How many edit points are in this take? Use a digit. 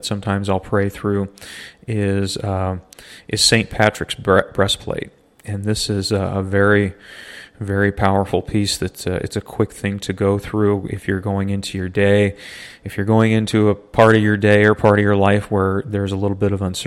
0